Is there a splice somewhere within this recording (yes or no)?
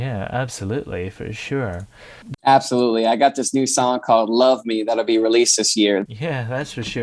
yes